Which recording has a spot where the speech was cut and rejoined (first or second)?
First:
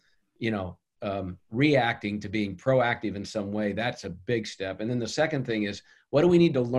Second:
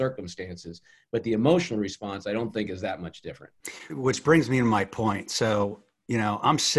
second